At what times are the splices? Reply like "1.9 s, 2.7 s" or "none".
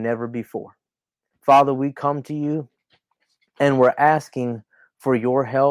1.3 s